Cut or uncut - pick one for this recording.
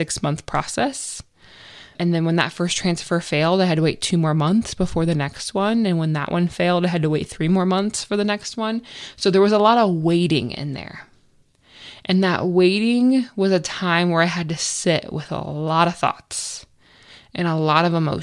uncut